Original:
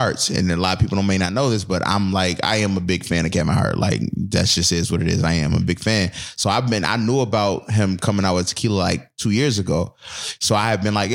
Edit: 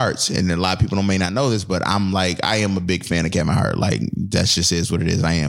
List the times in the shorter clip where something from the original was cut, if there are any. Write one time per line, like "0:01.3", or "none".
none

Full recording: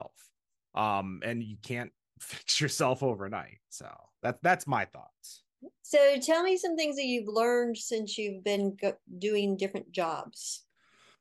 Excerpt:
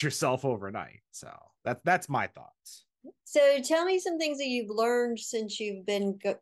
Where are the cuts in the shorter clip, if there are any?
none

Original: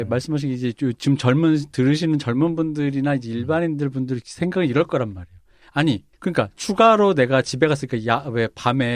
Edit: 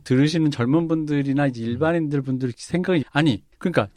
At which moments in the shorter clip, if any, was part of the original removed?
0:03.0

